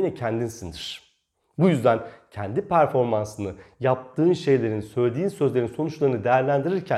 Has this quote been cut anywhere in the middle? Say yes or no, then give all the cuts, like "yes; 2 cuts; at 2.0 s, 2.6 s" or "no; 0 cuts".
no; 0 cuts